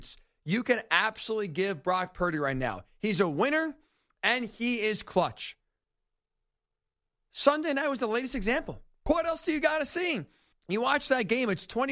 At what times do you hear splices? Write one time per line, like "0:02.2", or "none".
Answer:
0:09.1
0:10.5